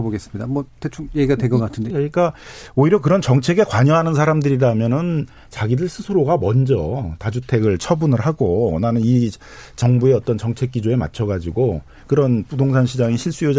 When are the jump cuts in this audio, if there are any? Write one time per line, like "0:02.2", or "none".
0:01.9